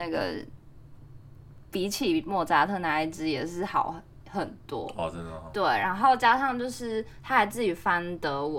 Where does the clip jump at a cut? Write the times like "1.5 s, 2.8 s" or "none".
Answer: none